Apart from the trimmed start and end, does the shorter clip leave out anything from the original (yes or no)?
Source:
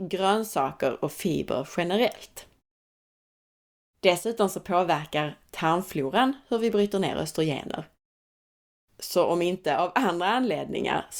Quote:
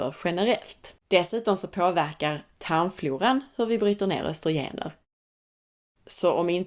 yes